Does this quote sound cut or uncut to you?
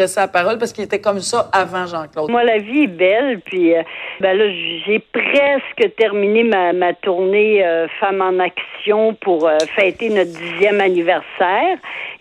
cut